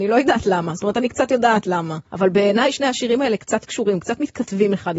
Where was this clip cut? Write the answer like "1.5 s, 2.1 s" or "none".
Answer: 2.1 s